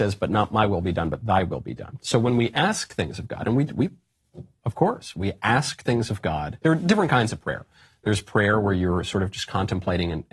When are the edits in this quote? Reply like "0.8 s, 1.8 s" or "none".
none

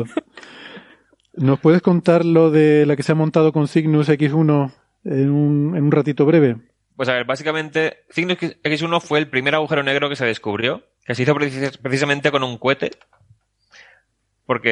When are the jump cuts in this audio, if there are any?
6.9 s, 11.0 s

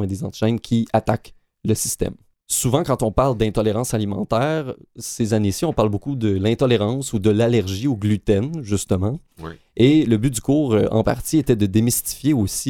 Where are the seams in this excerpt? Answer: none

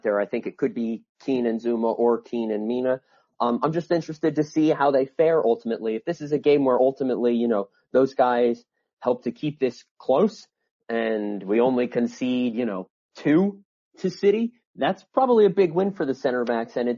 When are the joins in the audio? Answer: none

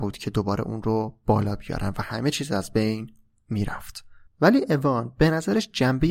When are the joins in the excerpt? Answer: 4.3 s

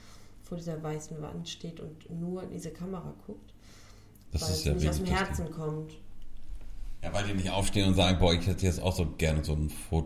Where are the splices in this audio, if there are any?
4.2 s

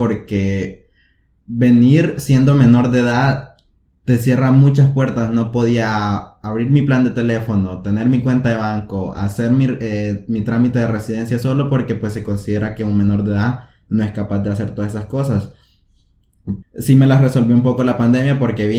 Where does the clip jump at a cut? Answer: 16.6 s

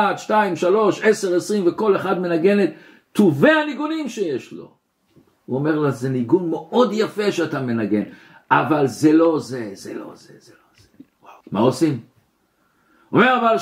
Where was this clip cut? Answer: 11.4 s

